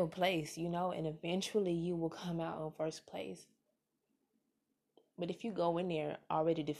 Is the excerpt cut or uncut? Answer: uncut